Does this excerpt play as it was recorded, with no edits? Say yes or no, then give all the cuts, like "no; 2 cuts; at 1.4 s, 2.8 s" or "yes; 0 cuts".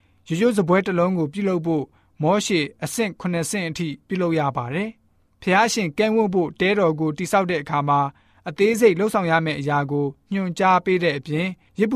yes; 0 cuts